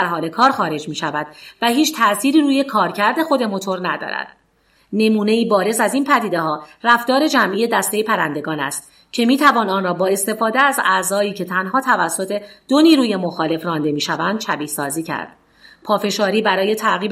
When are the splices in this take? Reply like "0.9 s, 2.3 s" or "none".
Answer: 4.8 s